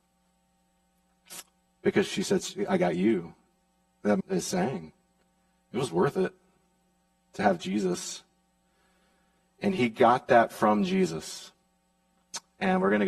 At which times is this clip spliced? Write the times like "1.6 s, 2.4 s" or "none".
4.2 s, 9.4 s

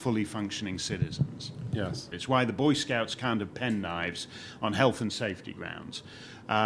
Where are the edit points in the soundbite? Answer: 2.1 s

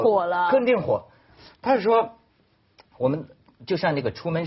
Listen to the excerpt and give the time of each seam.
1.3 s

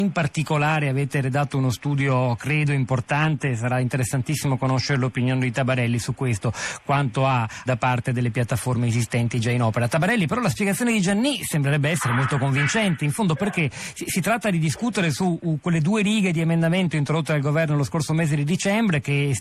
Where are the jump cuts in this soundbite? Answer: 7.7 s

